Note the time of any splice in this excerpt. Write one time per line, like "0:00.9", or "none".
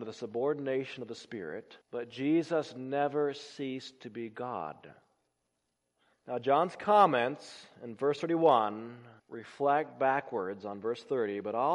0:01.8
0:06.1
0:09.2